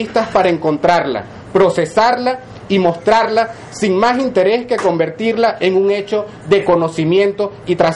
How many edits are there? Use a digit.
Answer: 0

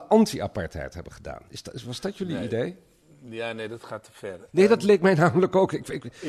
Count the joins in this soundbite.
0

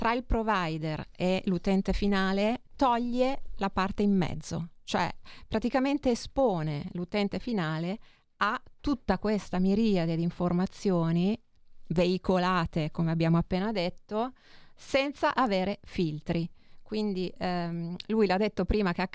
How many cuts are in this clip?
1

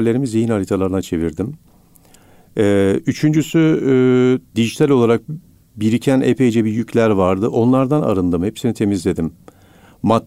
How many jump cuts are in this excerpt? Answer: 1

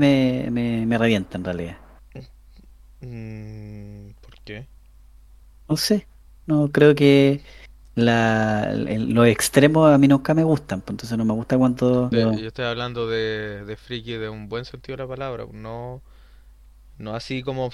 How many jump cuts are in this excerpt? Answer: 2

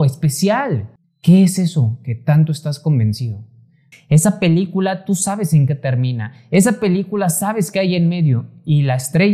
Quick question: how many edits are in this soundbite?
2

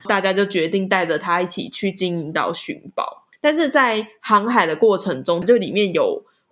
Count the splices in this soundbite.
2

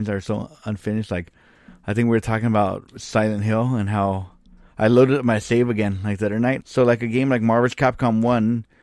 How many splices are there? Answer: 1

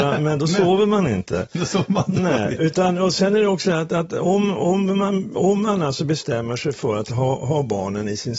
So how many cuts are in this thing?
0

